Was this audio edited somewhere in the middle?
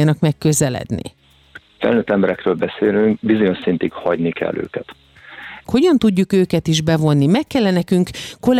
yes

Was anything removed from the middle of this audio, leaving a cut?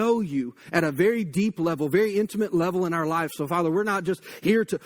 no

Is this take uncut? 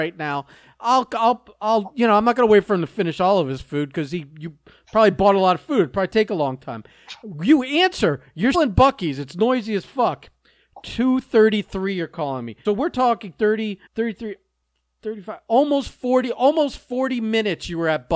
no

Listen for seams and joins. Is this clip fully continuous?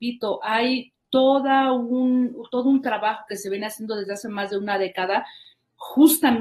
yes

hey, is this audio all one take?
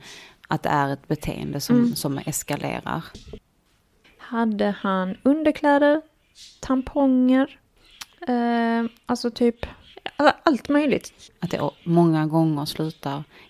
no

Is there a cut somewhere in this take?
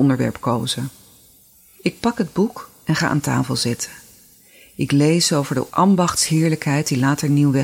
no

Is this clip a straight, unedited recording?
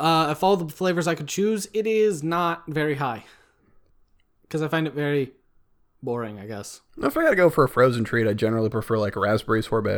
no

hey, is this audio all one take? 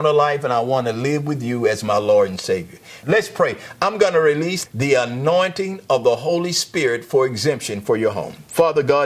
no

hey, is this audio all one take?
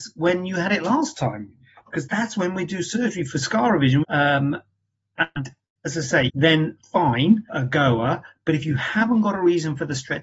no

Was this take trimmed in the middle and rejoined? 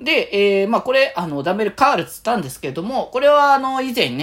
no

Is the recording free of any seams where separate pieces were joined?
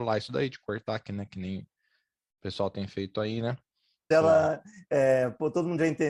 no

